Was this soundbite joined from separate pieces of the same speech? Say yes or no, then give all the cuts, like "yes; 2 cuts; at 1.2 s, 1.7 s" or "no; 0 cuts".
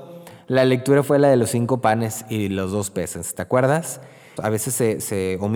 yes; 1 cut; at 4.4 s